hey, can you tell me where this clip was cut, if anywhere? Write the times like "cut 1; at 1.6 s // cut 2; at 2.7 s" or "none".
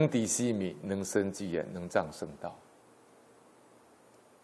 none